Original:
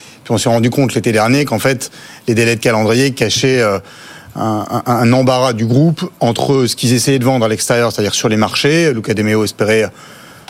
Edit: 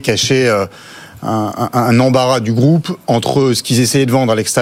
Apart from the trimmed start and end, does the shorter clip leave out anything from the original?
no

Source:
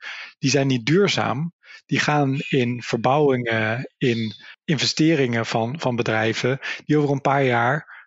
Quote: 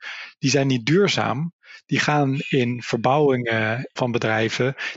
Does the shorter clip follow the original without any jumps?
no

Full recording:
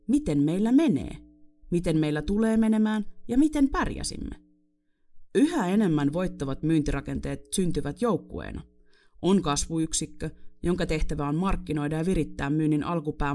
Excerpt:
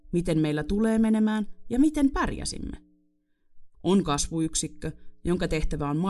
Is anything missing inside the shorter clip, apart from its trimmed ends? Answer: yes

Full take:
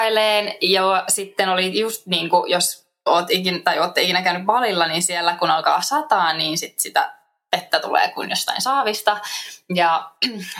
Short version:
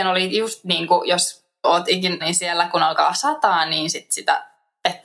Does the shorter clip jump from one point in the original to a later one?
yes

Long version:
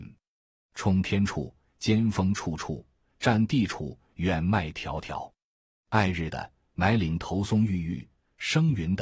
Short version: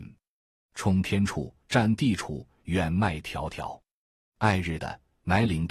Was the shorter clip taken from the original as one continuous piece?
no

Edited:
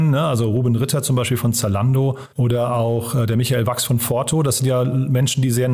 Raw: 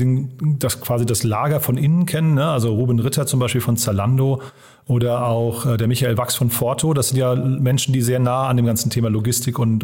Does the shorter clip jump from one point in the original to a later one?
yes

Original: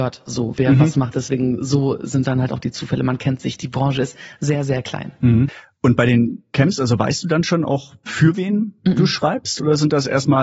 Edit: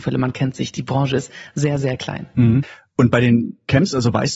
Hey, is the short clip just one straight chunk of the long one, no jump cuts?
yes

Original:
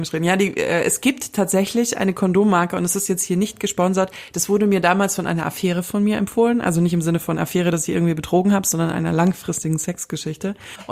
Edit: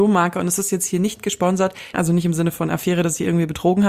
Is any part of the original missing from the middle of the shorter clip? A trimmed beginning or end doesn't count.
yes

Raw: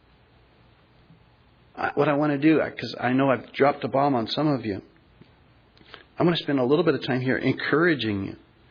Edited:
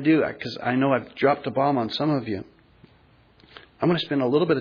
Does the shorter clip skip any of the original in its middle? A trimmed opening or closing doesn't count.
no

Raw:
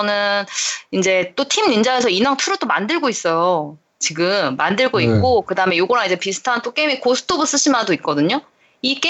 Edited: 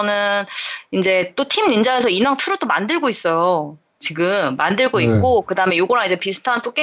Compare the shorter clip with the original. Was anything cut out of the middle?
no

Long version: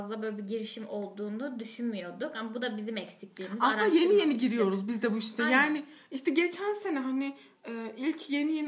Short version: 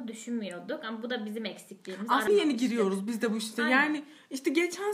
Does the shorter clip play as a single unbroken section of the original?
no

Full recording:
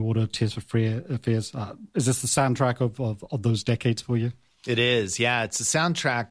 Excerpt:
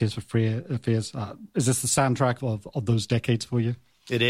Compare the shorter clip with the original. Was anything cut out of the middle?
yes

